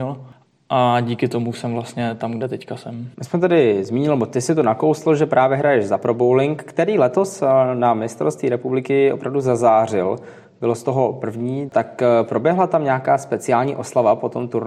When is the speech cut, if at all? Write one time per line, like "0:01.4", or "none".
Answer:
0:03.1
0:11.7

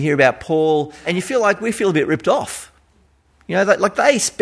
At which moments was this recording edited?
0:01.0

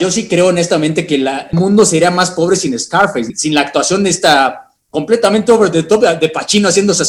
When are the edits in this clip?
none

